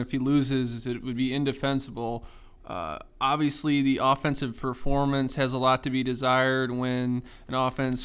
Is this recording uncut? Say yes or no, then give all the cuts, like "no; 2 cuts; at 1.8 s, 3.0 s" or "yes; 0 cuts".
no; 1 cut; at 2.6 s